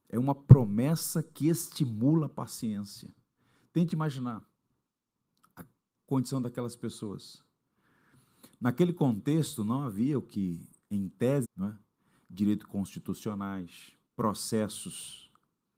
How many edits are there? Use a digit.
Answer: 2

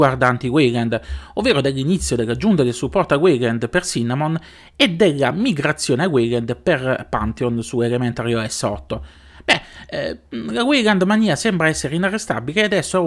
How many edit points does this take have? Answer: 0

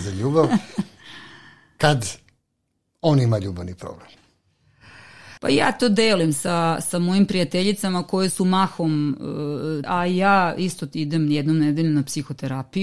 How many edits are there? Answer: 2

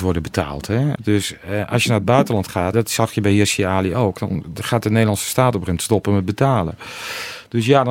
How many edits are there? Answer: 2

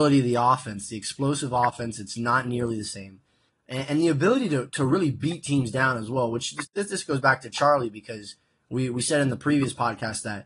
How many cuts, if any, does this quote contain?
1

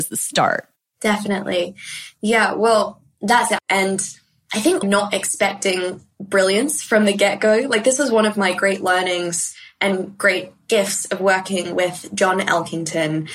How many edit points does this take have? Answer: 2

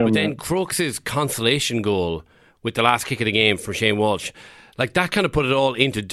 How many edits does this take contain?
0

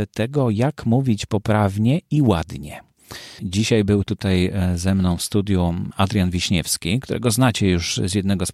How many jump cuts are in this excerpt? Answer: 1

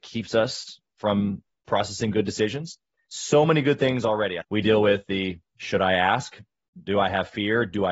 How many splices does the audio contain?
1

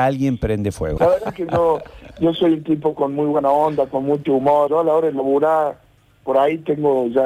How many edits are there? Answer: 2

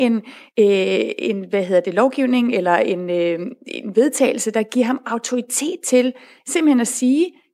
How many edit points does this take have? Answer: 0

